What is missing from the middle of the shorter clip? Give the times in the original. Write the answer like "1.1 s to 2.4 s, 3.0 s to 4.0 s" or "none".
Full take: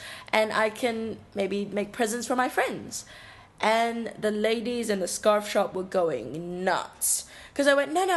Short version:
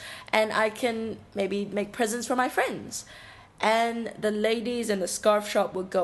none